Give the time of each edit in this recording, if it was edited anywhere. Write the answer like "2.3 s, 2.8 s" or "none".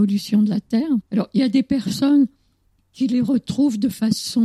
1.1 s